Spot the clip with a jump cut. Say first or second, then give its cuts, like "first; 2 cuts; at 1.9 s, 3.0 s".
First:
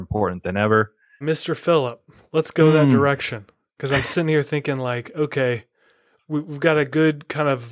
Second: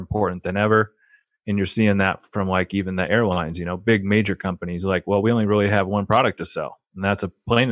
first; 1 cut; at 1.2 s